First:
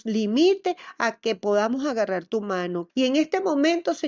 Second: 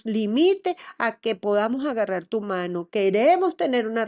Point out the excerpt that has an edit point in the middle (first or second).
first